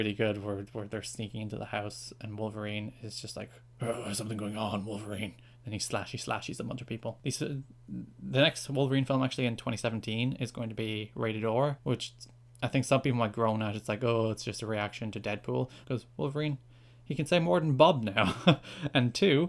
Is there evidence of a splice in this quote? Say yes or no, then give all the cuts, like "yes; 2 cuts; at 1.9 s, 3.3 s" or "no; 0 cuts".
yes; 1 cut; at 15.8 s